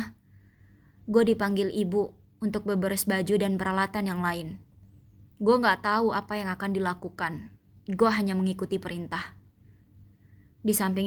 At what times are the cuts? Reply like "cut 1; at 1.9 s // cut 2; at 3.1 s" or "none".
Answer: none